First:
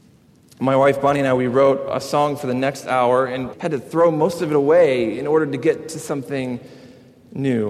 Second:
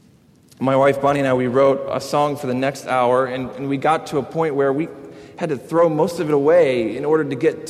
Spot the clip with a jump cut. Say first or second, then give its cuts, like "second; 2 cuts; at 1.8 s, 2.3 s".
first; 1 cut; at 3.5 s